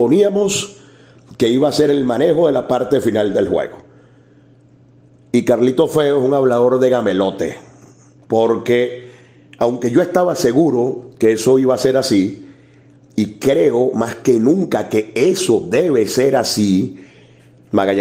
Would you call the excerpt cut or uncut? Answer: uncut